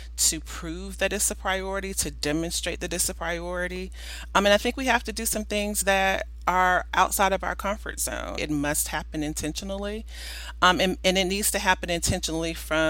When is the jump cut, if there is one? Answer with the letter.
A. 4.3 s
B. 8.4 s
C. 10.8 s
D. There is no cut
B